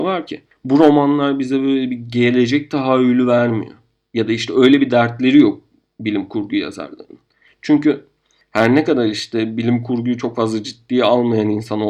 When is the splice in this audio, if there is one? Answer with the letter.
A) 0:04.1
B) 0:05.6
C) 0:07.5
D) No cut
C